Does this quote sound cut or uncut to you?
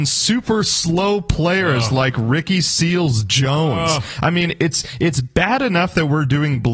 uncut